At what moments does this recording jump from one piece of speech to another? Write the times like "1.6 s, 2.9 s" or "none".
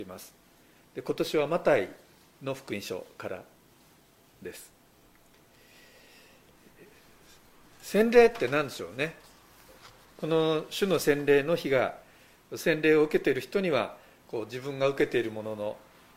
none